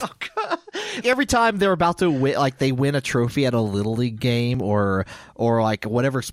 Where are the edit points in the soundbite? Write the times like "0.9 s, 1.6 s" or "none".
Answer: 1.0 s